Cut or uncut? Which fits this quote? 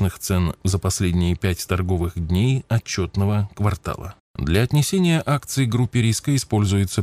cut